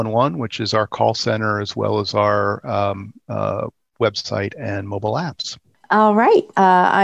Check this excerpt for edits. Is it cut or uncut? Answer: uncut